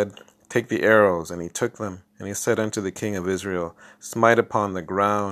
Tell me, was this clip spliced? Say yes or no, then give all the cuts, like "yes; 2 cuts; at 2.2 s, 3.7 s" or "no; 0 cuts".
no; 0 cuts